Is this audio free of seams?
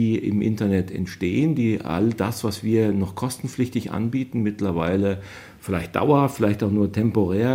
yes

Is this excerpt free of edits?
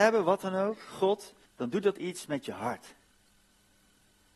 no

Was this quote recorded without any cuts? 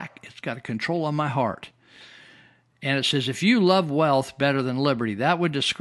yes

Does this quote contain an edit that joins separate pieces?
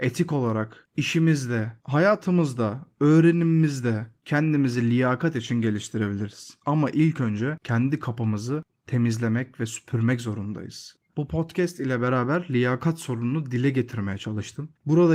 yes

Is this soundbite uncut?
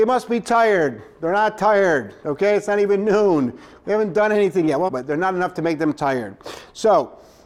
no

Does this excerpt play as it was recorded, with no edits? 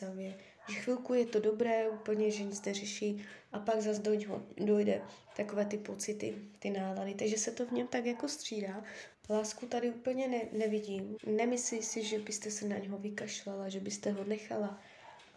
no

